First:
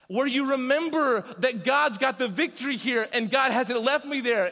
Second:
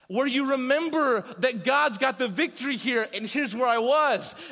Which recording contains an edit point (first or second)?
first